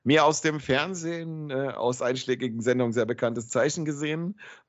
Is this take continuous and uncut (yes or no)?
yes